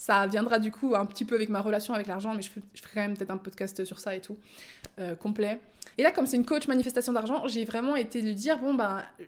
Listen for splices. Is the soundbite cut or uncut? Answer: cut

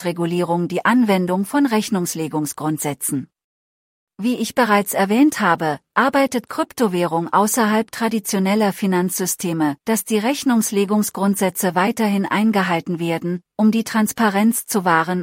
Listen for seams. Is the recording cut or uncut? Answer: cut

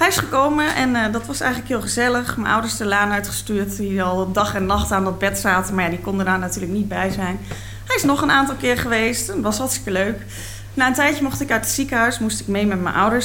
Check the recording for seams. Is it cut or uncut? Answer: uncut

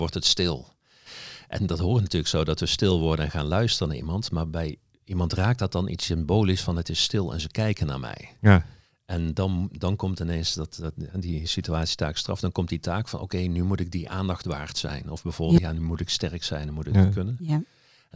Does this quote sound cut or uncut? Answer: cut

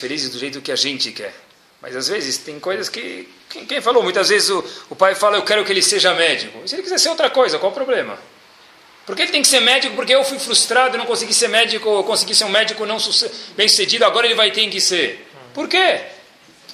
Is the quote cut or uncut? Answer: uncut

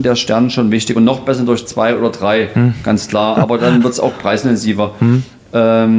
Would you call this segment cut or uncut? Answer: uncut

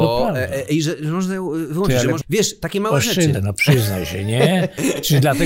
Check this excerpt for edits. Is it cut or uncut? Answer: cut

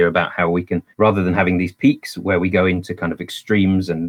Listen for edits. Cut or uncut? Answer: cut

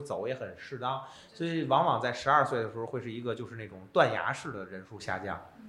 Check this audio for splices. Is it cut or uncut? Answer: uncut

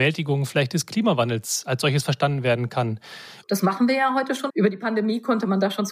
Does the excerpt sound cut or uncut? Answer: cut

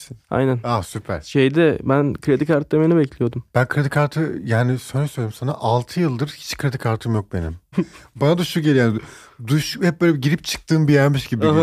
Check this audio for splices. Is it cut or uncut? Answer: cut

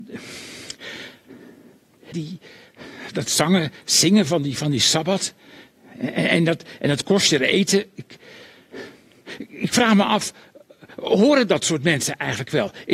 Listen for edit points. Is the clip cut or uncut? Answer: cut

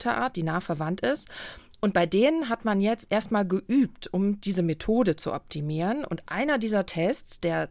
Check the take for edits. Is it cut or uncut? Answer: uncut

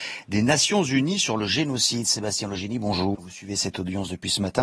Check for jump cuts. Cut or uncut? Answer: cut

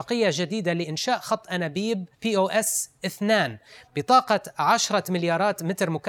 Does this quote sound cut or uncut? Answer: cut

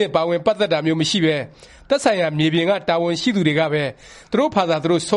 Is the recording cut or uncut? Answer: uncut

